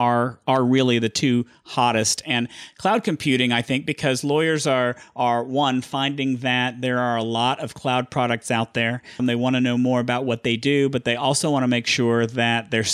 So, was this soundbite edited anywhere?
yes; 1 cut; at 9.2 s

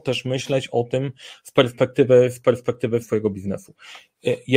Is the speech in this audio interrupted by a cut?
yes; 1 cut; at 3.0 s

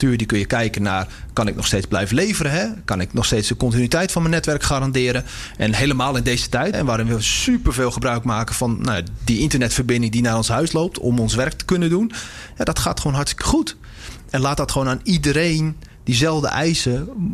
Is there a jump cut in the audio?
yes; 2 cuts; at 6.7 s, 14.3 s

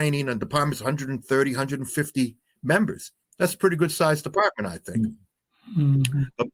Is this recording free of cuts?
yes; 0 cuts

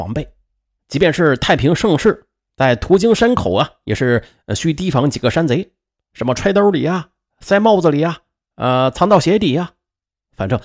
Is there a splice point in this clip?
no; 0 cuts

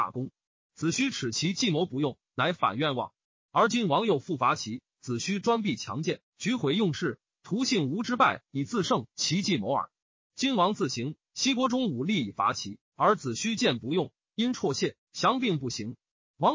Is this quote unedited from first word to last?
yes; 0 cuts

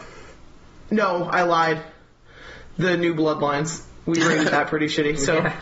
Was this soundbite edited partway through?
no; 0 cuts

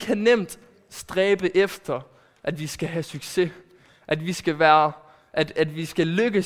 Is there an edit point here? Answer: no; 0 cuts

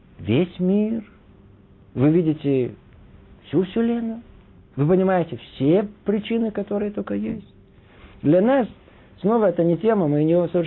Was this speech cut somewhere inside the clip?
no; 0 cuts

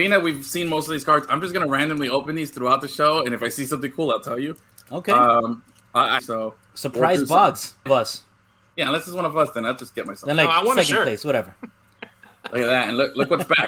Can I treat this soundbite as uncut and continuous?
no; 2 cuts; at 6.2 s, 7.9 s

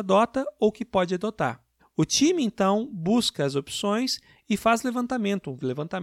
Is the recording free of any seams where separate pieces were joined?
no; 1 cut; at 1.8 s

